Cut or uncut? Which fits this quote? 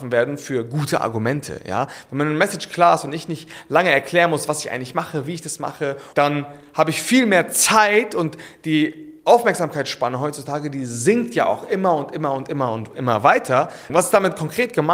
cut